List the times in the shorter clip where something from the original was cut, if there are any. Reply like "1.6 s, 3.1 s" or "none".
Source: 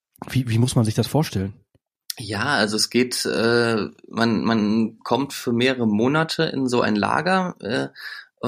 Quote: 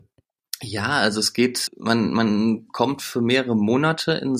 1.7 s